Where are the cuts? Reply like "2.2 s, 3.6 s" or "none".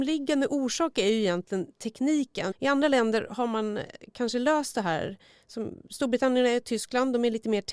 2.5 s